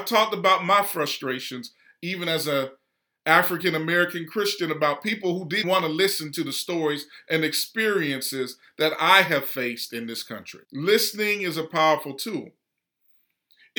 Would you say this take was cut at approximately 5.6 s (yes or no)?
yes